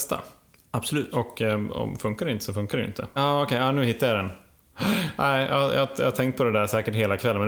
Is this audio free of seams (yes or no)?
no